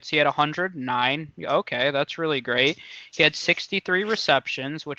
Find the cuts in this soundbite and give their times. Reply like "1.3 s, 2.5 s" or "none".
1.4 s

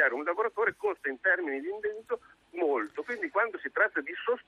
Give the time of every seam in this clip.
none

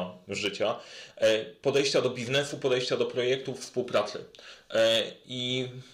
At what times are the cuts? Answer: none

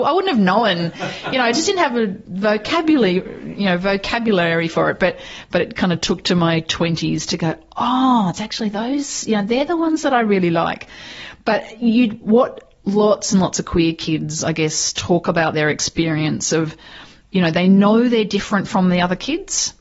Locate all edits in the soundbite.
none

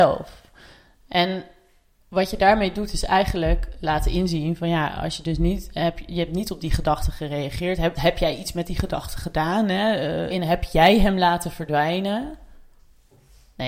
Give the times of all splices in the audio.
8.0 s, 10.3 s

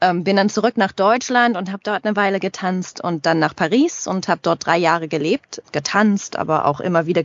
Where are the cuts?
5.6 s

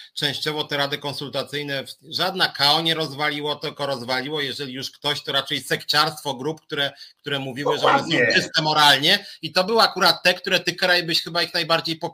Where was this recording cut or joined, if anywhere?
none

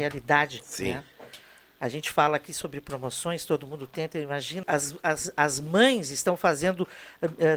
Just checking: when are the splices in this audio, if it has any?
4.6 s

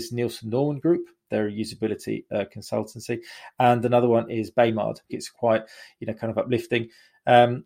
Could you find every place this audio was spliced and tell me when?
5.1 s

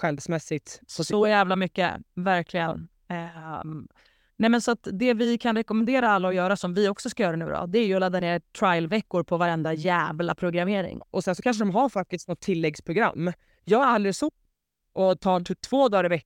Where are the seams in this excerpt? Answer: 11.0 s

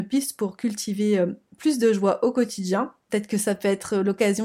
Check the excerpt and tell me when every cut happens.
3.1 s

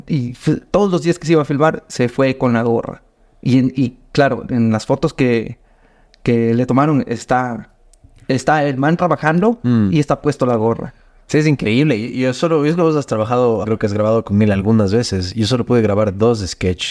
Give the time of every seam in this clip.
13.6 s

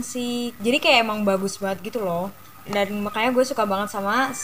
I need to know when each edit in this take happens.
2.6 s

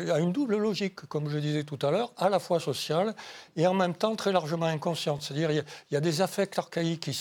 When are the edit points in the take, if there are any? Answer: none

